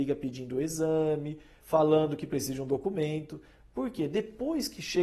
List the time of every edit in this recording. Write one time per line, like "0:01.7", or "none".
0:01.6